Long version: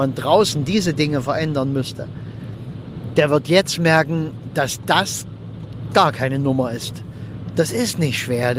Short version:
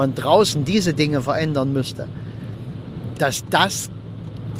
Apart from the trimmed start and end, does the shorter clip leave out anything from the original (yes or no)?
yes